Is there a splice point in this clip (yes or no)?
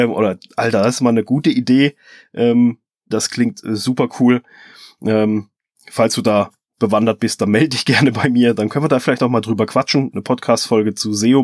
yes